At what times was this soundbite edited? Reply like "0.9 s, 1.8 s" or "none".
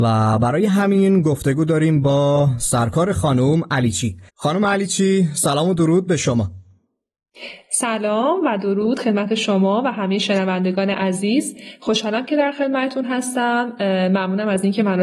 4.3 s